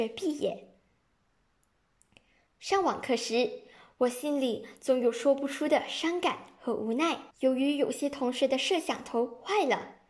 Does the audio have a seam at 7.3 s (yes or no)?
yes